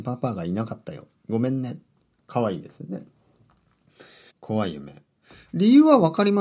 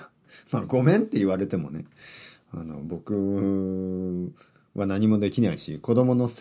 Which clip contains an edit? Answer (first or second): first